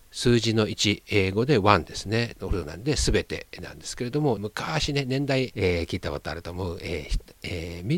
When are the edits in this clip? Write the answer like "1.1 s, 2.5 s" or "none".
2.3 s, 4.4 s, 5.5 s